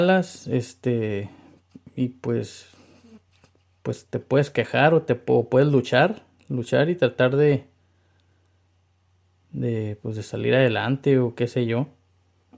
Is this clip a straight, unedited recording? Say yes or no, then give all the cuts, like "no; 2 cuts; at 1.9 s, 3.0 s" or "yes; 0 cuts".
yes; 0 cuts